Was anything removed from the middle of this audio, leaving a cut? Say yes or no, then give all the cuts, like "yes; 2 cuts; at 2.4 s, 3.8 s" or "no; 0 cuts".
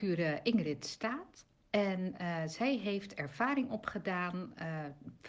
no; 0 cuts